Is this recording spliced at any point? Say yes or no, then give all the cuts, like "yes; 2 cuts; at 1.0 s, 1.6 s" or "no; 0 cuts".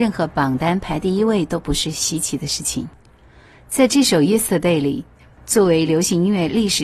yes; 1 cut; at 5.4 s